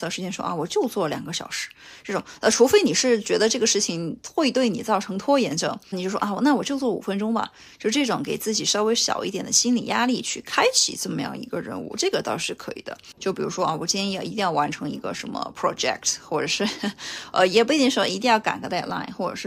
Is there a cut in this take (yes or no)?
yes